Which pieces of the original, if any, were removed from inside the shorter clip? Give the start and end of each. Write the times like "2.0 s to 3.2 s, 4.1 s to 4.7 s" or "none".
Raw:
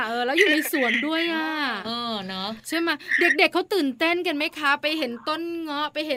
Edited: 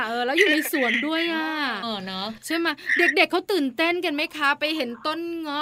1.8 s to 2.0 s